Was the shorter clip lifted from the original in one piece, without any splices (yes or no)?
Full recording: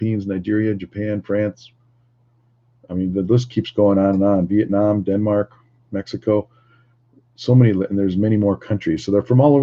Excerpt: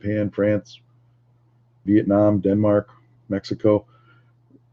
no